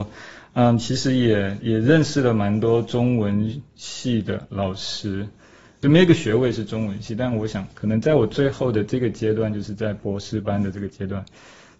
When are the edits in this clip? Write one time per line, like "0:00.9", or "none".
0:01.6